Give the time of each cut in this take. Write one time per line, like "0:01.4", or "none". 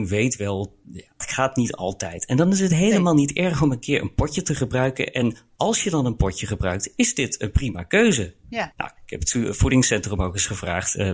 0:01.2
0:08.7